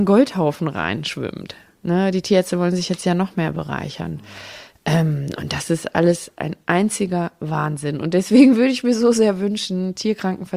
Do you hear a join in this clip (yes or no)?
no